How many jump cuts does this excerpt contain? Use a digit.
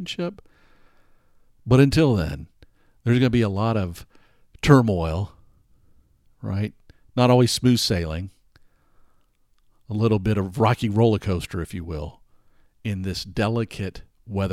0